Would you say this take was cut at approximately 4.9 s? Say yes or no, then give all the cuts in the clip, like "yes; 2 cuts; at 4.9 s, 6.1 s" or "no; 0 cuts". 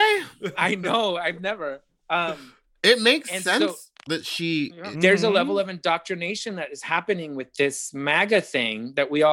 yes; 1 cut; at 4.9 s